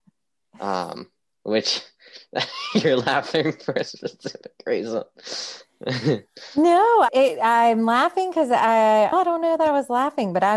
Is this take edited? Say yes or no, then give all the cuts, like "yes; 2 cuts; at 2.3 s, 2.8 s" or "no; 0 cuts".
yes; 2 cuts; at 7.1 s, 9.1 s